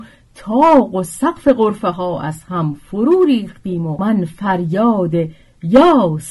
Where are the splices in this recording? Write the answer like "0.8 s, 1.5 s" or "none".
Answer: none